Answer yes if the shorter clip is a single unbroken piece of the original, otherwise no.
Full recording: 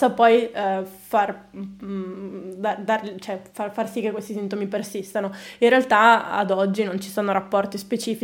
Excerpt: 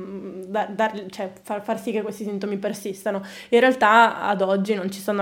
yes